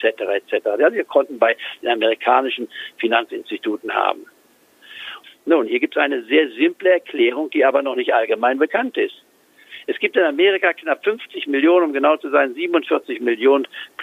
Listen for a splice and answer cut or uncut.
cut